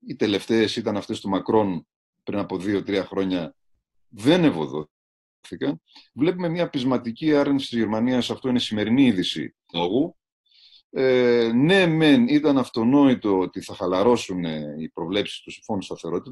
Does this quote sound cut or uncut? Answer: cut